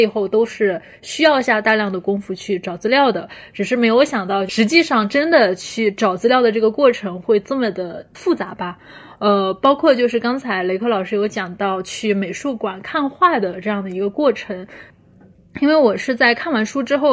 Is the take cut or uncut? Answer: uncut